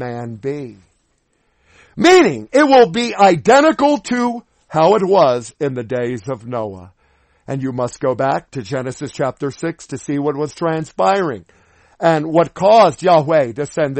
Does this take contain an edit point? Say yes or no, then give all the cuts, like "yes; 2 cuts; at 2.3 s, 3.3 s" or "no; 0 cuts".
no; 0 cuts